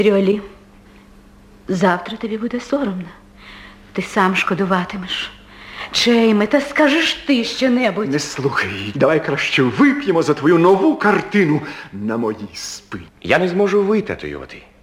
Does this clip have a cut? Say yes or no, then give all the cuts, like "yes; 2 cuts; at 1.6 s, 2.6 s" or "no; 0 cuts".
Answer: yes; 2 cuts; at 8.9 s, 13.1 s